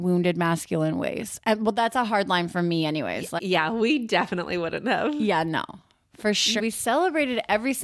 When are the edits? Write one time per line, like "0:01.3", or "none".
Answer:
0:03.4
0:06.6

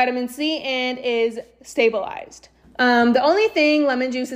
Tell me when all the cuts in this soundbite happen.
0:02.6

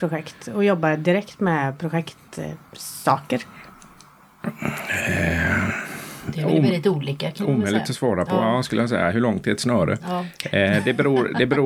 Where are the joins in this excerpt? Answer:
none

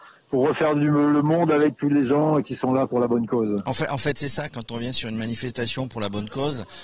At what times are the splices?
none

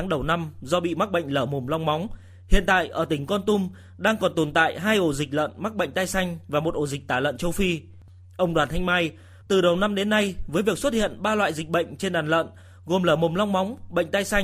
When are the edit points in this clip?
0:09.4

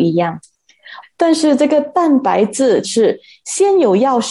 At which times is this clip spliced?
0:01.0
0:02.8

